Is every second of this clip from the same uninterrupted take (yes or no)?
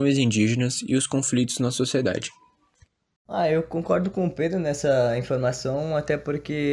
no